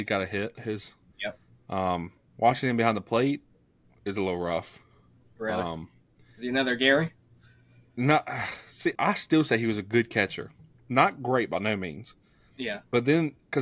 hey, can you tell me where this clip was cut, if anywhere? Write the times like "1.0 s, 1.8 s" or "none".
2.3 s, 9.0 s